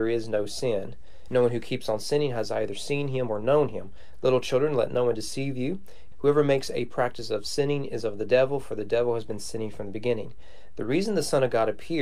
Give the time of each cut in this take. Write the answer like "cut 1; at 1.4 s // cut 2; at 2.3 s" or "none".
cut 1; at 1.3 s // cut 2; at 6.1 s